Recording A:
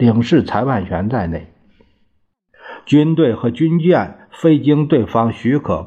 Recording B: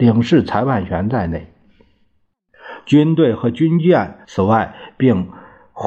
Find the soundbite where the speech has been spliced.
B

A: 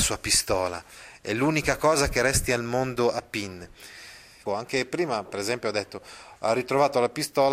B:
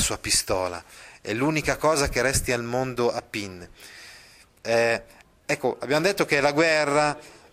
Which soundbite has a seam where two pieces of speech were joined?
A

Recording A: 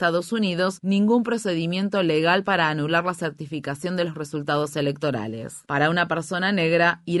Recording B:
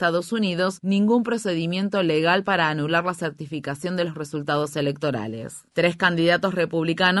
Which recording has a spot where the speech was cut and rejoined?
A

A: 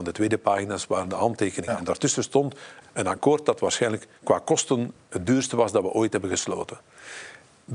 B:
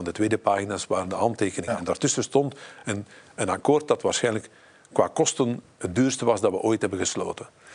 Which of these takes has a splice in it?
A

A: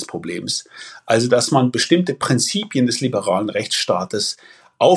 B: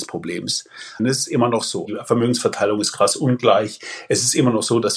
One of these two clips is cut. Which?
B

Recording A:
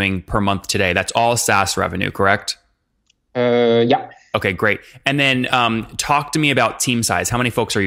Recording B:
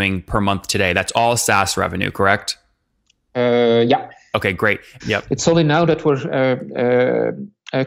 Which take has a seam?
B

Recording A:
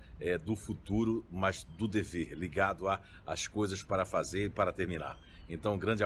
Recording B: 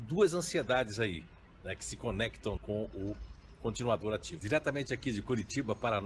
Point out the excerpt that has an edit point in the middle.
B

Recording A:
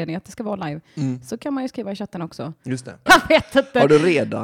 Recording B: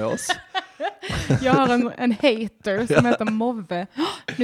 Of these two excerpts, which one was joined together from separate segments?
A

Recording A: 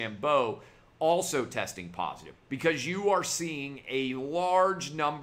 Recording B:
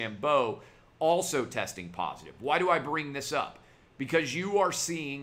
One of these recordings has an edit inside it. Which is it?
A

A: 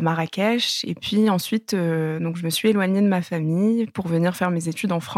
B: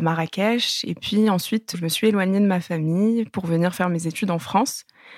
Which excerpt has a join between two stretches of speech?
B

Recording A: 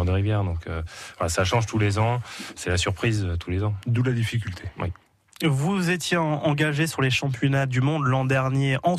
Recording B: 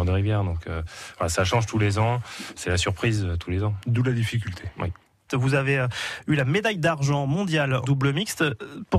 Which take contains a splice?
B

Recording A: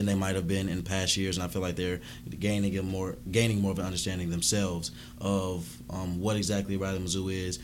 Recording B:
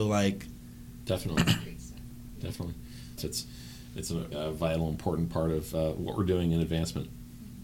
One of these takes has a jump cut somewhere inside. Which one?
B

